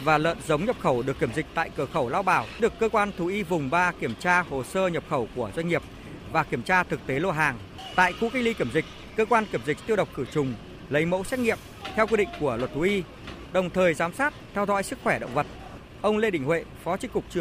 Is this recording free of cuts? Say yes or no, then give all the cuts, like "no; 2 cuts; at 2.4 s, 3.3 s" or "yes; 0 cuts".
yes; 0 cuts